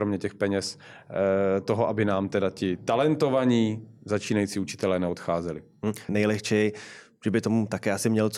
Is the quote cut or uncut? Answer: cut